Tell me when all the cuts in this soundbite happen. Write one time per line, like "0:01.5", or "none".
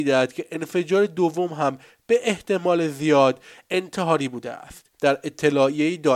0:04.9